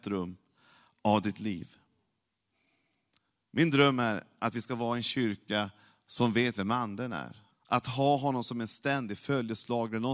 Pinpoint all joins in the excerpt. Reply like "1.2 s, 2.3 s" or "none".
7.5 s